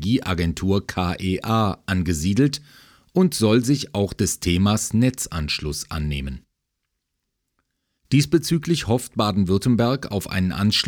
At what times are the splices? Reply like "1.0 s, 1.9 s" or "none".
8.0 s